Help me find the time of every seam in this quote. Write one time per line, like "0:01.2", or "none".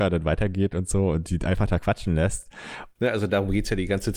0:03.0